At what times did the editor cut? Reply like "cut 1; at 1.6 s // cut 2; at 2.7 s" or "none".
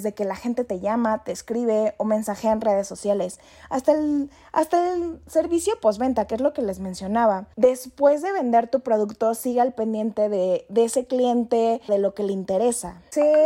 cut 1; at 7.5 s // cut 2; at 11.9 s